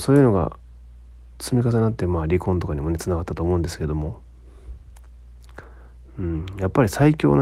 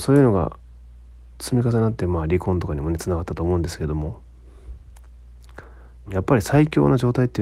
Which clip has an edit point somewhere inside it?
second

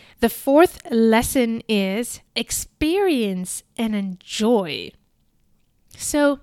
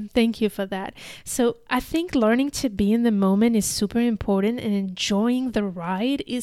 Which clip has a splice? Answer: first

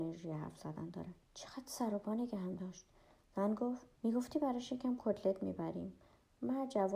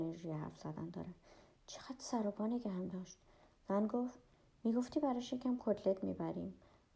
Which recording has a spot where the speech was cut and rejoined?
first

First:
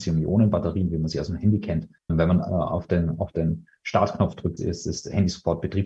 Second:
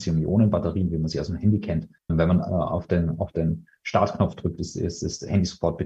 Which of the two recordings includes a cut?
first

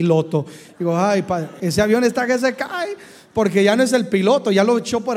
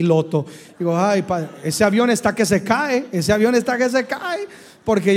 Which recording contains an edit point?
first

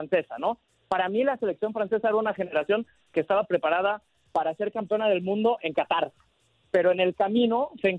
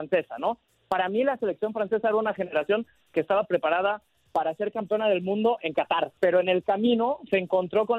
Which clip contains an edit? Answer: second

